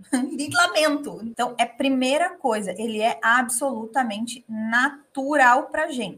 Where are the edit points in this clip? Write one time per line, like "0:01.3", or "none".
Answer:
0:01.3